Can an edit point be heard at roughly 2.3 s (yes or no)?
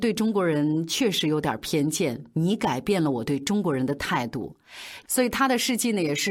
no